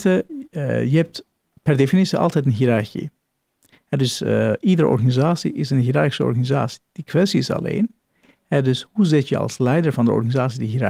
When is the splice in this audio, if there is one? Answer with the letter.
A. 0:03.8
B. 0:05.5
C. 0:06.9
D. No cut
D